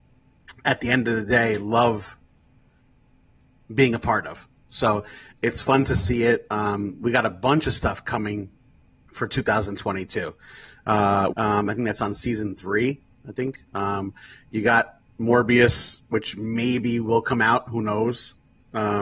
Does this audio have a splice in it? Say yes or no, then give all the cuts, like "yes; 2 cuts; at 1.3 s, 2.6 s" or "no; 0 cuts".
yes; 1 cut; at 11.3 s